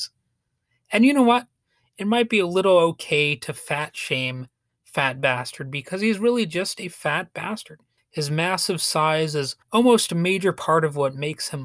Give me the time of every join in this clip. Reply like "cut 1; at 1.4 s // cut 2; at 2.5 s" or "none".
cut 1; at 8.0 s // cut 2; at 9.6 s